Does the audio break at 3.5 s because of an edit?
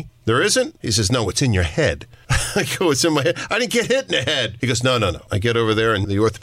no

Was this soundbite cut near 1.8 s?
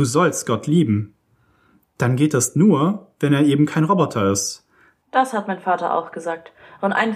no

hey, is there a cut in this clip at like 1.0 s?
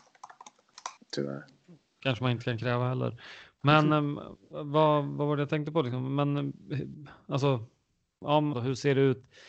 yes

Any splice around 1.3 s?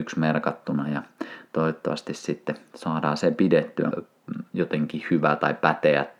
no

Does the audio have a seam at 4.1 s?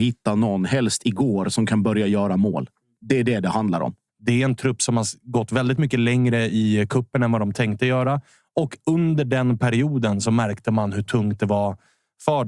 yes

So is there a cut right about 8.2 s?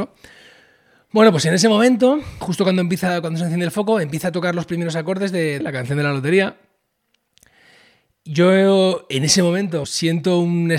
no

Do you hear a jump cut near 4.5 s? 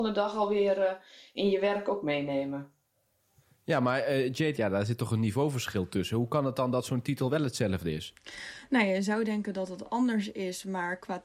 yes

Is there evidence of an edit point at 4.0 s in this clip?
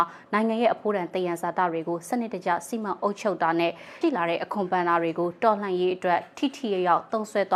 yes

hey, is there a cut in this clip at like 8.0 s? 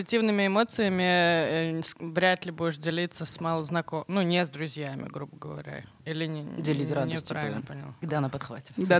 yes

